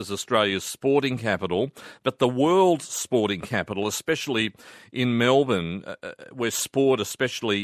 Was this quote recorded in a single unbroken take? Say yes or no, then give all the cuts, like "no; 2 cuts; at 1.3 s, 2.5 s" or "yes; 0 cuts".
yes; 0 cuts